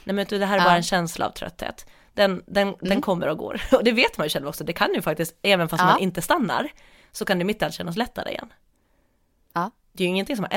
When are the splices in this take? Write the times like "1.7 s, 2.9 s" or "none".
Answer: none